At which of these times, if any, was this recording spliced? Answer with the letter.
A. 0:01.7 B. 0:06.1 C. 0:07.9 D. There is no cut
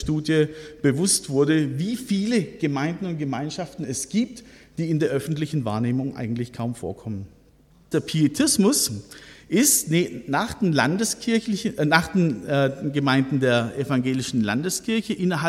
C